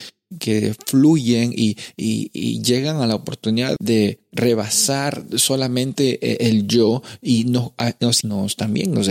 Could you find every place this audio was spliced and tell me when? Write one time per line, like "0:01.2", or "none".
0:03.8
0:08.2